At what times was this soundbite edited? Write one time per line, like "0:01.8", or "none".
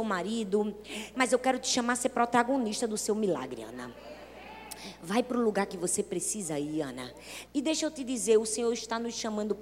0:01.1
0:07.5

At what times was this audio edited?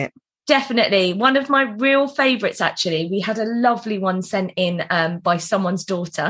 none

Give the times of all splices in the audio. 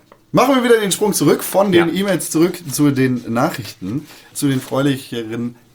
0:04.3

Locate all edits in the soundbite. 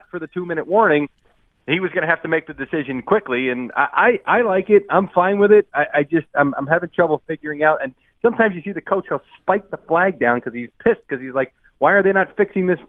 none

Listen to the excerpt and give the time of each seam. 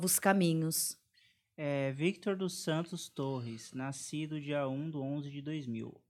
none

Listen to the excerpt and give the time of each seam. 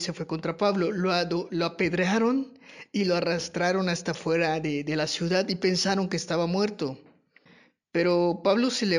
none

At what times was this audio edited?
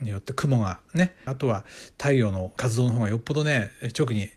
0:01.3
0:02.6

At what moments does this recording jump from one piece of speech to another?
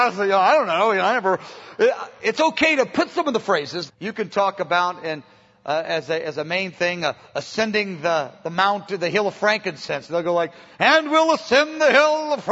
0:03.9

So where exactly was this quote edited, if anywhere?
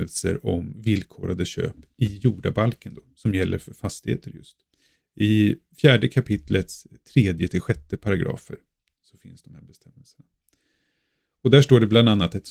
none

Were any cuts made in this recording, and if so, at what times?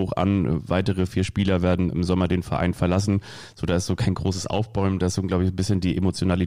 0:01.9

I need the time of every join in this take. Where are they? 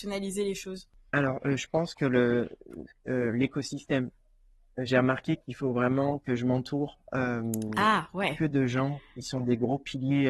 none

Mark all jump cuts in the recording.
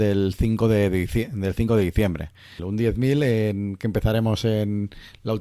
0:02.6

